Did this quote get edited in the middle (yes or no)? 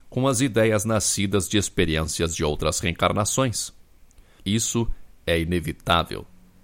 yes